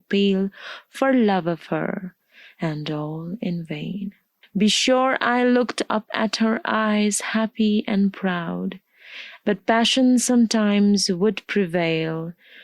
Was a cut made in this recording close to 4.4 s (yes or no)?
yes